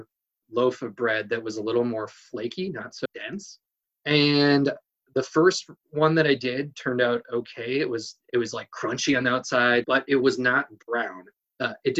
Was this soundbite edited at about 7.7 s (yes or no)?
no